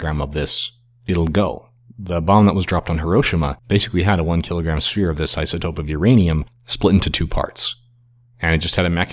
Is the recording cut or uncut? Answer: uncut